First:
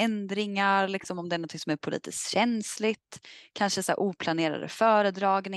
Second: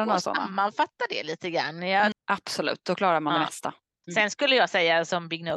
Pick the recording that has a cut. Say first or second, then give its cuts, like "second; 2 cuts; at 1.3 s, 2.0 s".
second; 2 cuts; at 2.1 s, 4.0 s